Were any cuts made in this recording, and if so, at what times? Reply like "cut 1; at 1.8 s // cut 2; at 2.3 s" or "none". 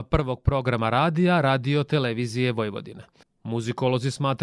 cut 1; at 3.2 s